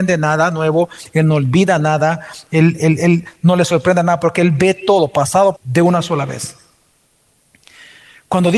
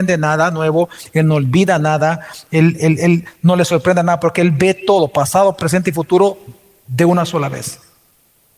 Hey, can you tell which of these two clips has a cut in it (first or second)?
first